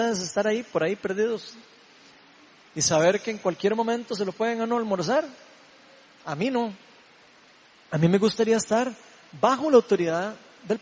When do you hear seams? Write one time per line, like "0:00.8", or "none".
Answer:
none